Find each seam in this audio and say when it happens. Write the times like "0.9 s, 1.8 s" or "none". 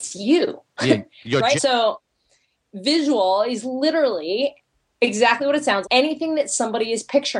1.6 s, 5.8 s